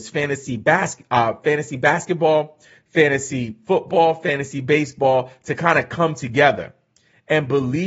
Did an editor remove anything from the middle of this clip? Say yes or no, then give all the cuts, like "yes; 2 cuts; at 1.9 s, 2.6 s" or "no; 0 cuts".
no; 0 cuts